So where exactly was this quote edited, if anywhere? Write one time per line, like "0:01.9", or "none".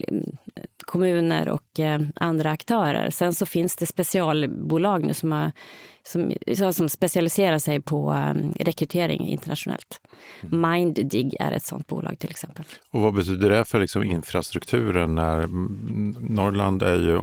none